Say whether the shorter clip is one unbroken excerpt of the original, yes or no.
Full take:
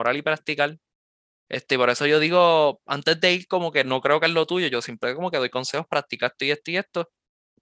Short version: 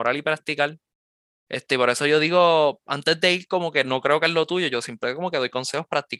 yes